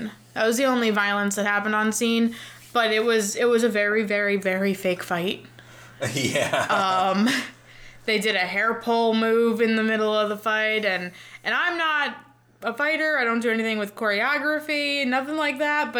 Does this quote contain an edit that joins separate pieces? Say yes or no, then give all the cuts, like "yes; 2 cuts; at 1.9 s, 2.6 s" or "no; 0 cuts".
no; 0 cuts